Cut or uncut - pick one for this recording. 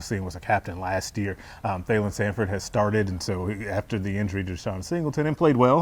uncut